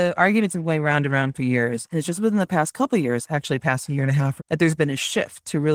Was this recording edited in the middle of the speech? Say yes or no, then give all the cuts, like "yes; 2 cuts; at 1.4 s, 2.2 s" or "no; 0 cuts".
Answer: yes; 1 cut; at 4.4 s